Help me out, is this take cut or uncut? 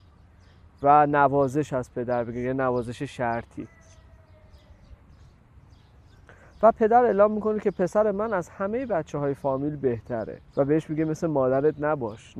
cut